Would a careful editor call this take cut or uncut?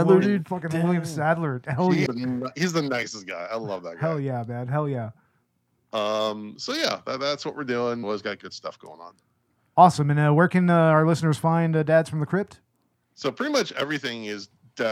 cut